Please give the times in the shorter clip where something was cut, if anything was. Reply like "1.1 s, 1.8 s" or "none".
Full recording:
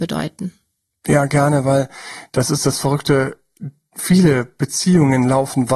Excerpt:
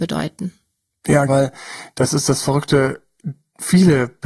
1.3 s